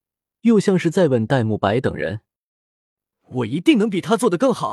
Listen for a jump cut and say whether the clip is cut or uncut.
uncut